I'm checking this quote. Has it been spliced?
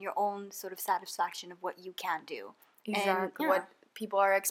yes; 1 cut; at 3.4 s

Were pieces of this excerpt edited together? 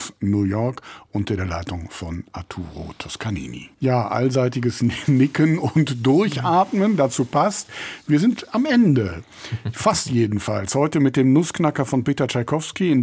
yes; 1 cut; at 3.7 s

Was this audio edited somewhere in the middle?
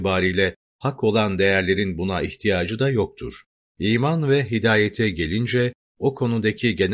yes; 1 cut; at 3.7 s

